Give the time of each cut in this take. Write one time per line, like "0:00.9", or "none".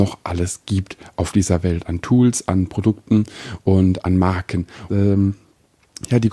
0:04.9